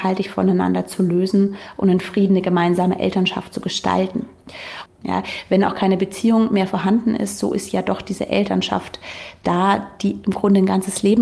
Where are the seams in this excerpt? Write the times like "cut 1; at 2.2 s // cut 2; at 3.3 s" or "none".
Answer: cut 1; at 4.9 s